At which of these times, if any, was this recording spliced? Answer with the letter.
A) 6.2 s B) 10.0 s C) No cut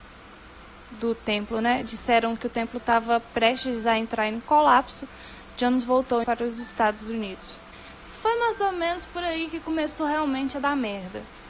A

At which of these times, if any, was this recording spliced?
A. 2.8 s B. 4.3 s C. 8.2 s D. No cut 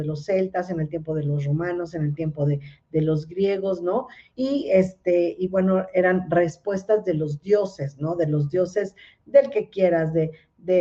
B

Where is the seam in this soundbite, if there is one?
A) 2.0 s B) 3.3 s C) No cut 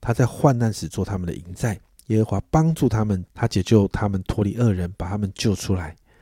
B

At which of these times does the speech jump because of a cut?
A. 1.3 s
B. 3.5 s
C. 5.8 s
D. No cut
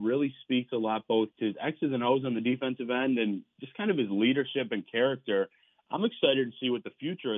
A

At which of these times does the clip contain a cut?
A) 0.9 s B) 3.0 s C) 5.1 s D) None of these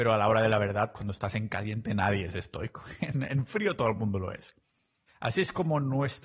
C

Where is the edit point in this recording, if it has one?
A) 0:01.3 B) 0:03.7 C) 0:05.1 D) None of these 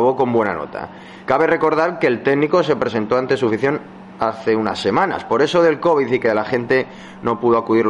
A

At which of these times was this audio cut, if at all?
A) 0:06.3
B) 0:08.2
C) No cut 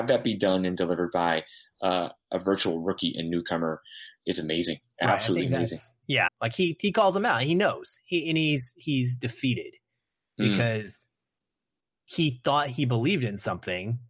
A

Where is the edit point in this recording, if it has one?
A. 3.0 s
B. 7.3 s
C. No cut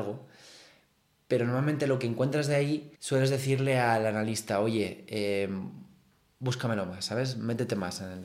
A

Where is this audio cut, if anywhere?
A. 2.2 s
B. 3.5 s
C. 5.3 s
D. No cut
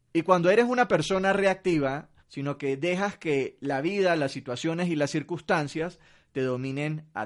A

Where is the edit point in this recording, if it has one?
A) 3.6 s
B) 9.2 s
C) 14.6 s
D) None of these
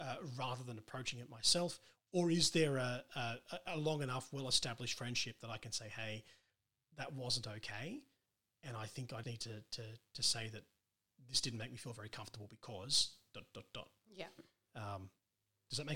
B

